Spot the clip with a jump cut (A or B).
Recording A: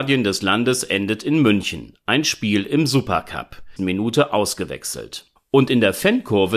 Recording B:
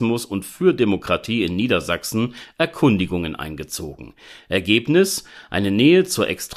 A